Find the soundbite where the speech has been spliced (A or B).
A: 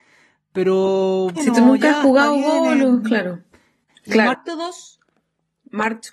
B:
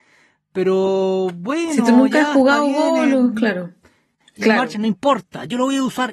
A